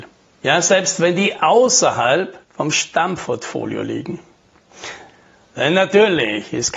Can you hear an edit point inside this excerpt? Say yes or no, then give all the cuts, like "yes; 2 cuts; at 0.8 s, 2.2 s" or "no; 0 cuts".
yes; 1 cut; at 2.4 s